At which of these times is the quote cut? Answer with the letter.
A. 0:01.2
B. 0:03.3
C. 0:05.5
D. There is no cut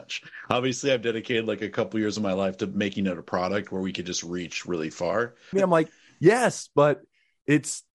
C